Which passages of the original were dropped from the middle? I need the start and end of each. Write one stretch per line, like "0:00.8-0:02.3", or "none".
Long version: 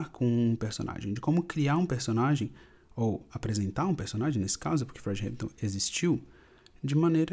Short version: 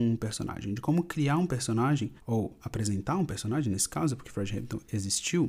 0:02.6-0:02.9